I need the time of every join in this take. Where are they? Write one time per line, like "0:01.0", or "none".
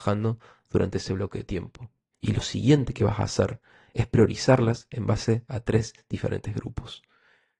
0:02.1